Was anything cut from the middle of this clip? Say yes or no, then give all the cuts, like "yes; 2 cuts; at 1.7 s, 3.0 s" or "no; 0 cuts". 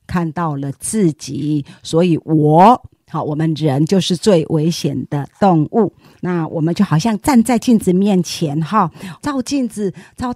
yes; 2 cuts; at 6.1 s, 9.2 s